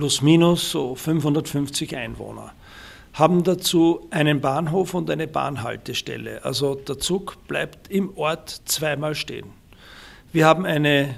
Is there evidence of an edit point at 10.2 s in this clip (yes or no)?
no